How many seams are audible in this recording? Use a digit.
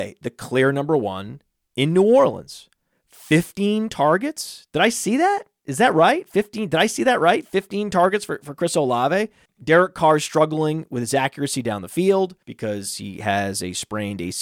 2